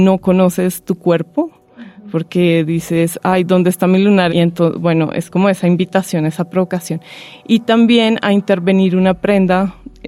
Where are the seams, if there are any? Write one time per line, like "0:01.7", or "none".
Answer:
0:04.3